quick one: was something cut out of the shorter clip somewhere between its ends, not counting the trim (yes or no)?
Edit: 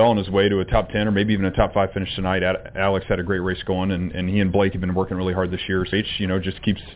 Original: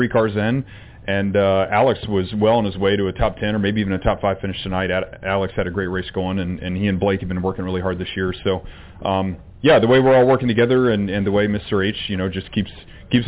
yes